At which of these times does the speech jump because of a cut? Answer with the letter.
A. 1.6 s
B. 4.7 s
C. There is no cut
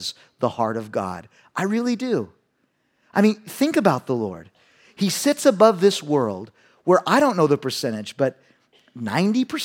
C